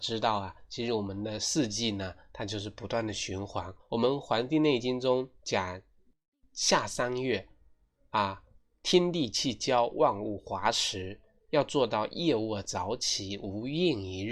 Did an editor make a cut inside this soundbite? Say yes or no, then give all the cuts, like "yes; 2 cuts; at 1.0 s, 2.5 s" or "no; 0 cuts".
yes; 1 cut; at 3.8 s